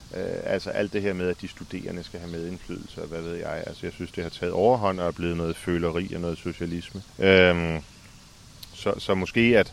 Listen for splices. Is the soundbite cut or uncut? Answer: cut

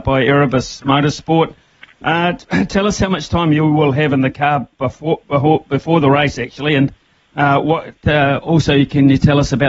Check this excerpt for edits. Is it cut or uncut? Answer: uncut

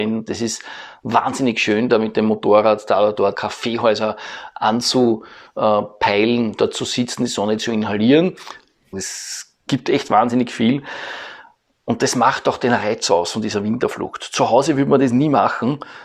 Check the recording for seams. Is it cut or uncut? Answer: cut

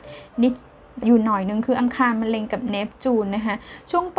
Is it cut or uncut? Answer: cut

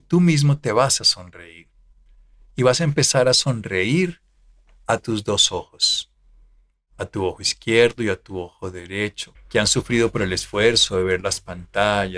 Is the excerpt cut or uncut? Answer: cut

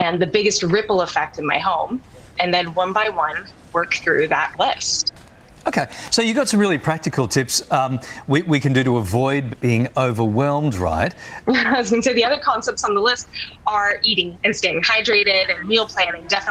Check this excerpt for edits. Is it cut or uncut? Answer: cut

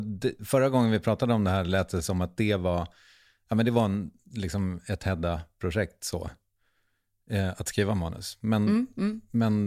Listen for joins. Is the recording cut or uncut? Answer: uncut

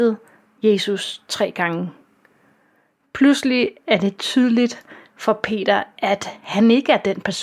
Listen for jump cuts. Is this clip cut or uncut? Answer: cut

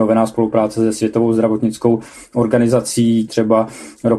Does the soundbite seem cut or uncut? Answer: cut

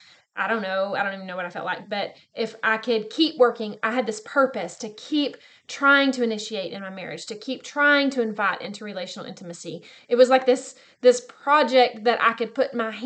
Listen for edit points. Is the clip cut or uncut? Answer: uncut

